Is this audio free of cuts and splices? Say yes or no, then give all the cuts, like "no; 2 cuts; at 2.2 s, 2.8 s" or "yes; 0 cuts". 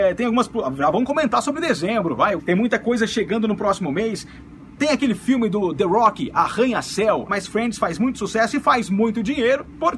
no; 2 cuts; at 2.4 s, 7.3 s